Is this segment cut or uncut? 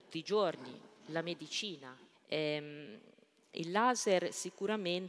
cut